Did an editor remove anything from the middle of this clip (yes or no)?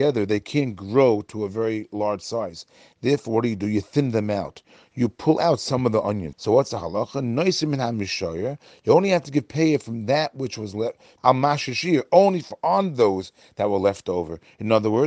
yes